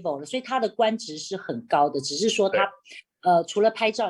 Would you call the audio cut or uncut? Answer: uncut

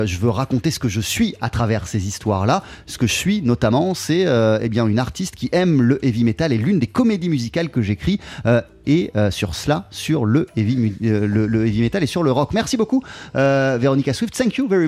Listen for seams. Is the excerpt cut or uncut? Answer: uncut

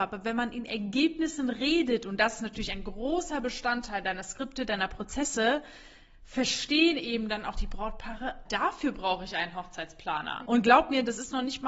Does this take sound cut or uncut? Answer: cut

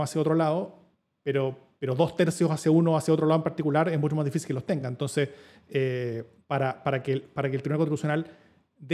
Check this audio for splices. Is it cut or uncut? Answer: uncut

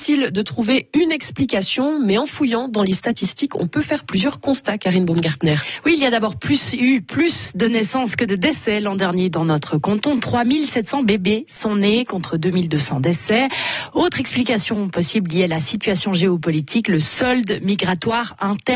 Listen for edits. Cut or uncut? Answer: uncut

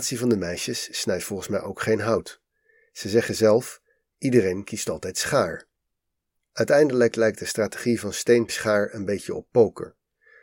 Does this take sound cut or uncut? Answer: cut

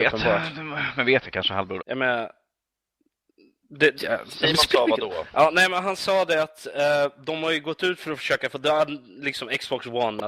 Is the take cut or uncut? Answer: cut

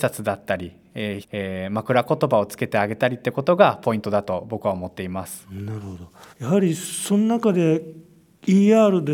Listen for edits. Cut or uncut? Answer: cut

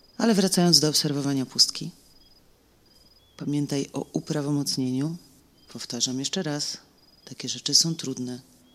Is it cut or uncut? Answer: uncut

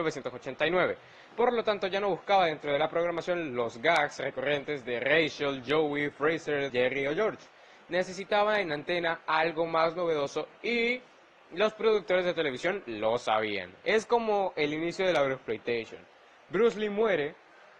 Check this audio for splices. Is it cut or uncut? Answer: cut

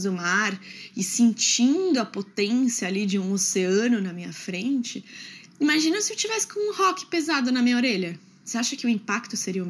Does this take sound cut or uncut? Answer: uncut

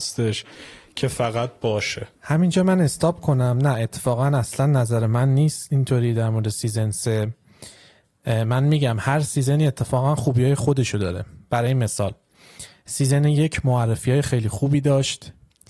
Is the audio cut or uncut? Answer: cut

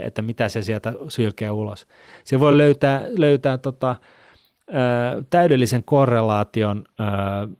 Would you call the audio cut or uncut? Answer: uncut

